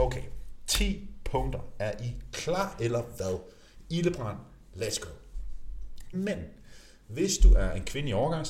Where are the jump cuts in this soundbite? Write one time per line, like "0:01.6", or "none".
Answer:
0:06.1